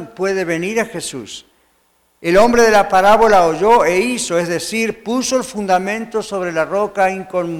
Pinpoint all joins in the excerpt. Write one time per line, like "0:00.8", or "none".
none